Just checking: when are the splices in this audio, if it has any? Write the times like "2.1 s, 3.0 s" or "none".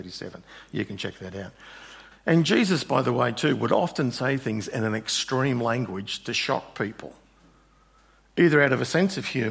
2.1 s